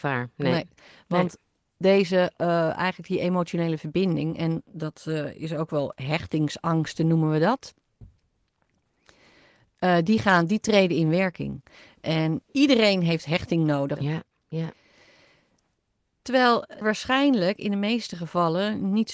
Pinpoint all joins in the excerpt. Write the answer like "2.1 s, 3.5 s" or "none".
14.0 s, 16.8 s